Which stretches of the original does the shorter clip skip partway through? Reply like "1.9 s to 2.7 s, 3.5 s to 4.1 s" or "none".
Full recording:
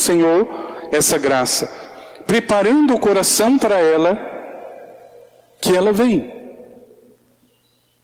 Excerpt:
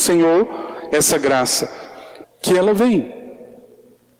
2.2 s to 5.4 s